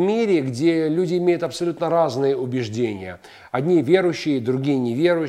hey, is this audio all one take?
yes; 0 cuts

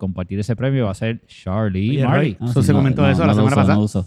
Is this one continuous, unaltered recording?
no; 1 cut; at 2.4 s

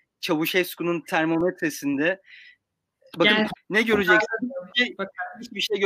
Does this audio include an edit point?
yes; 1 cut; at 3.6 s

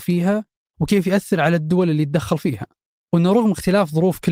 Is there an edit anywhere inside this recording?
no; 0 cuts

